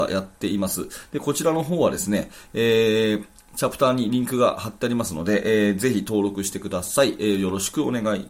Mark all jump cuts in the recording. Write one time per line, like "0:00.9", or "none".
none